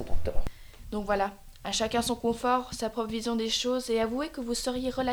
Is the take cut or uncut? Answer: uncut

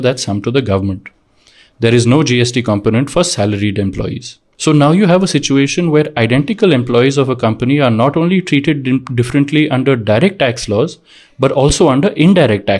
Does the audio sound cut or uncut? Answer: uncut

